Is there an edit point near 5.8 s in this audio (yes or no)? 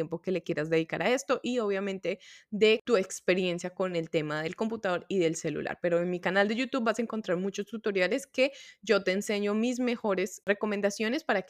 no